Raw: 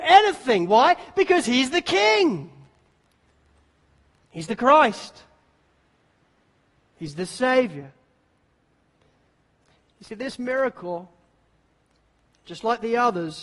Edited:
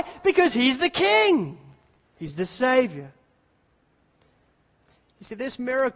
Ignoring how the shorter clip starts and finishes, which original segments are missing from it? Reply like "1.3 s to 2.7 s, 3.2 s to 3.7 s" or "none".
3.0 s to 6.8 s